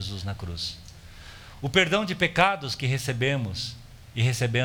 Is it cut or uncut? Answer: uncut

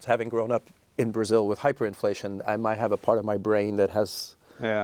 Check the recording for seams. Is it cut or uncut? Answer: cut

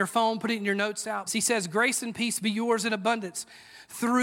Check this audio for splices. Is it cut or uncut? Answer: cut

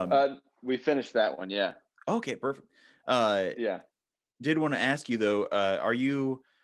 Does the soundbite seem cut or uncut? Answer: uncut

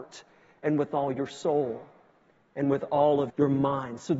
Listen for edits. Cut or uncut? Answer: cut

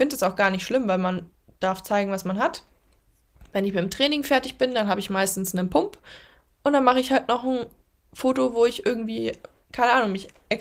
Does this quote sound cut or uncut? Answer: uncut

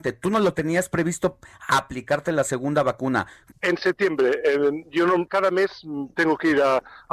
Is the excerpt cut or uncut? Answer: cut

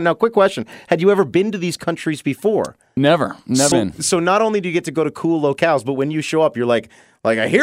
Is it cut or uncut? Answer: cut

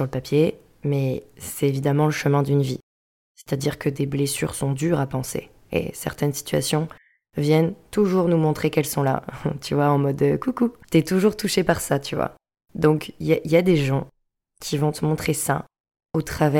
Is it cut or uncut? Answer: uncut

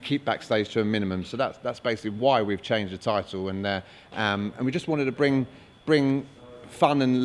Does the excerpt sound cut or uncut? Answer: uncut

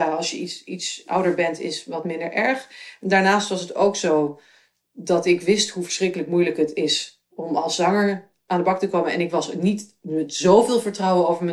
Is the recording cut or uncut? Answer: uncut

